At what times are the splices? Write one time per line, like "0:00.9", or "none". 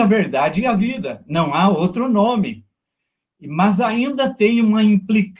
none

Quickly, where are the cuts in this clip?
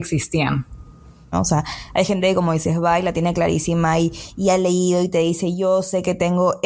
0:01.3

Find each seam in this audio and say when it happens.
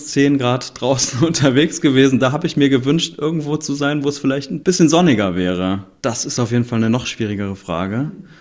0:04.6
0:06.0

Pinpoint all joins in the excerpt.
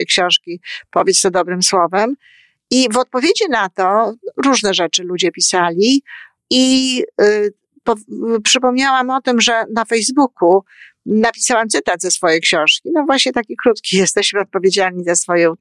0:06.4

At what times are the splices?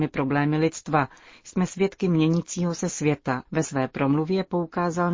0:03.5

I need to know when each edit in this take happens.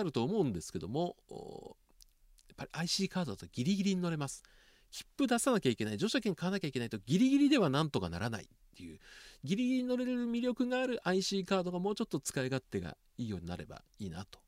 none

